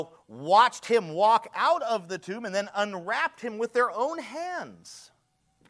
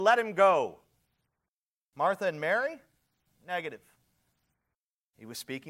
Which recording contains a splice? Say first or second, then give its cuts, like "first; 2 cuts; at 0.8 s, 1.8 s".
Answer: second; 1 cut; at 1.9 s